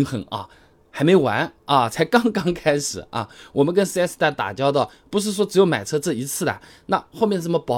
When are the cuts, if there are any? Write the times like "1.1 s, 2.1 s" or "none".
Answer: none